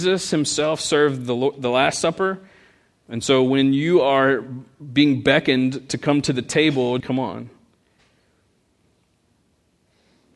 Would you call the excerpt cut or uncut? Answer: cut